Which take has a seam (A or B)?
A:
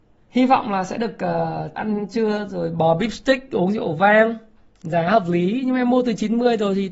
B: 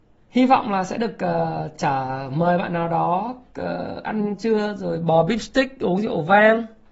A